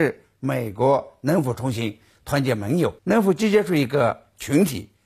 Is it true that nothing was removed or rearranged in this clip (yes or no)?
no